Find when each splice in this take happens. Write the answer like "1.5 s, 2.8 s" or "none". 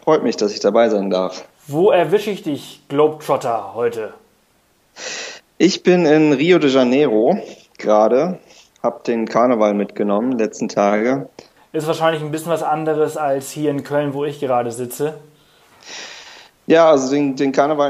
11.6 s

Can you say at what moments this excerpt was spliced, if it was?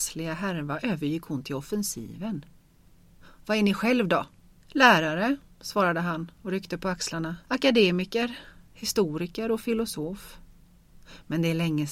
4.6 s, 7.4 s

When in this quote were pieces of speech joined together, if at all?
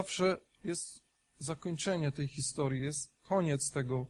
none

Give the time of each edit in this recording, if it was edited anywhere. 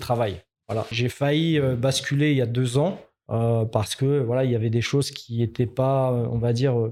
0.9 s

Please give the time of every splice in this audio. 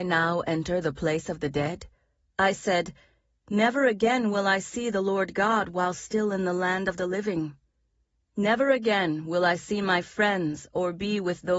2.2 s

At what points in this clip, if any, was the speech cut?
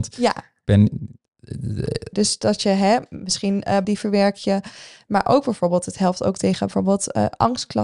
2.1 s, 3.8 s

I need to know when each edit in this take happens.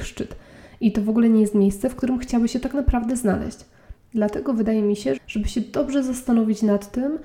4.0 s, 5.2 s

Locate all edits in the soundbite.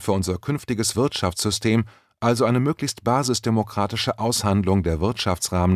none

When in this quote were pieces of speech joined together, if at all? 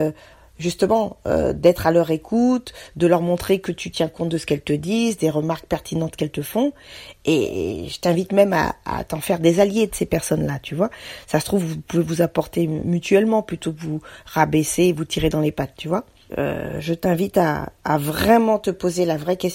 16.3 s

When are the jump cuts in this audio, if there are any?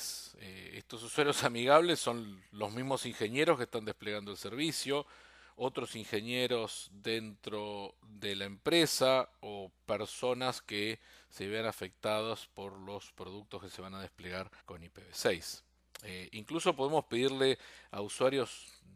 14.6 s

